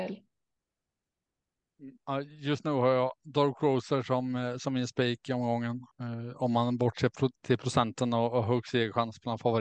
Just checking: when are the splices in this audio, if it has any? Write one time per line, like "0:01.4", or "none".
0:05.9